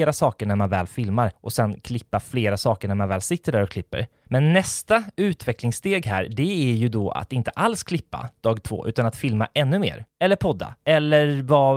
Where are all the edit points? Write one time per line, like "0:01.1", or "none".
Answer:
none